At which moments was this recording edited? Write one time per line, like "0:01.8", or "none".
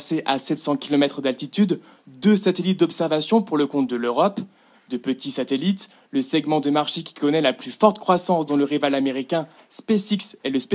none